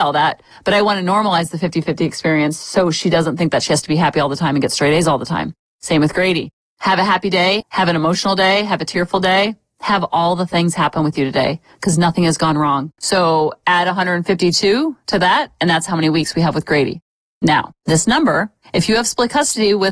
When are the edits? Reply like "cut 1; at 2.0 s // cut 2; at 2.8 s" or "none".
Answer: cut 1; at 7.6 s // cut 2; at 13.0 s